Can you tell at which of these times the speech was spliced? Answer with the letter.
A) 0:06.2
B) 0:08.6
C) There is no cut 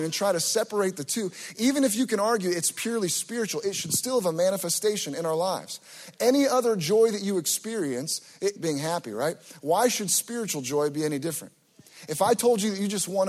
B